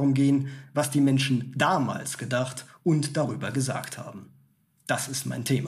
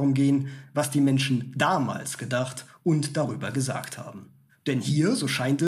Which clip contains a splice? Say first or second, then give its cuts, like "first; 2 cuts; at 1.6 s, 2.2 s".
second; 1 cut; at 4.5 s